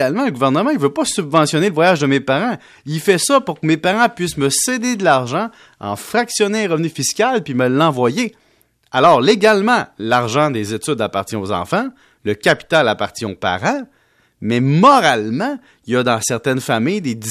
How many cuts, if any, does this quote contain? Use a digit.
0